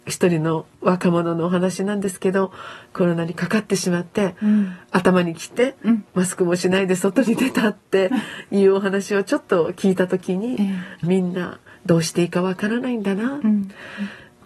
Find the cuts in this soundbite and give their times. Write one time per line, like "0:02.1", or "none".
0:11.0

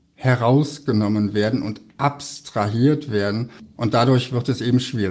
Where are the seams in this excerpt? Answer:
none

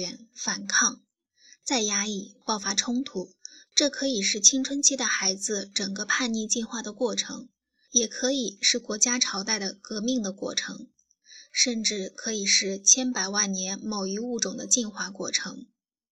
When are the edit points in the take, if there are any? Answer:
0:03.7
0:07.8

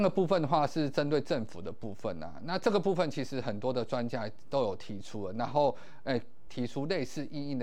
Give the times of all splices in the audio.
0:06.5

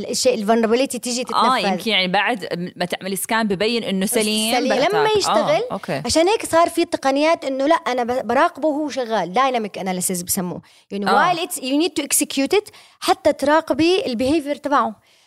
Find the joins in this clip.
0:04.8

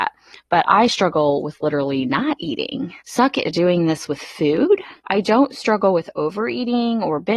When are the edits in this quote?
0:03.0
0:05.0

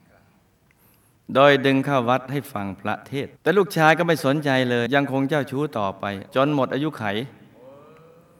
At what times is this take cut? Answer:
0:03.4
0:04.9
0:06.3

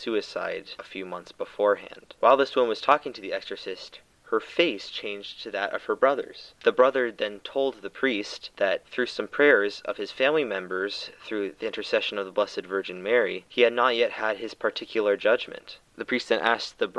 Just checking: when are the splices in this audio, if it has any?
none

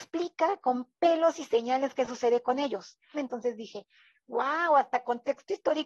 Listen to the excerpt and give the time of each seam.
0:03.1

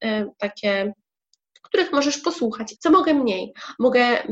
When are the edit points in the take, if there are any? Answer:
0:02.8

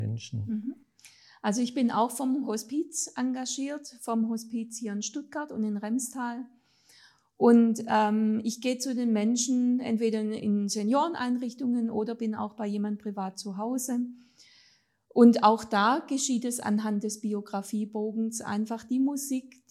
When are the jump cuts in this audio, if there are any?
none

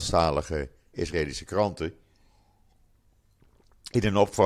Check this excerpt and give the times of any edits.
0:00.9

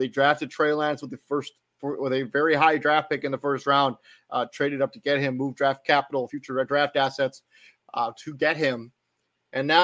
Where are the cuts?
none

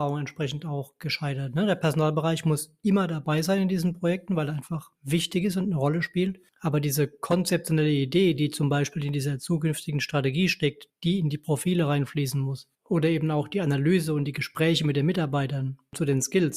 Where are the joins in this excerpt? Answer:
none

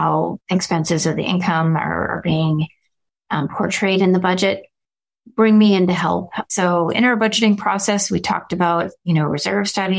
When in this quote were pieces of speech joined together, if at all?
0:06.5

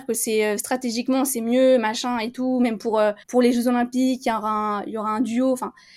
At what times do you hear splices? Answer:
0:03.2

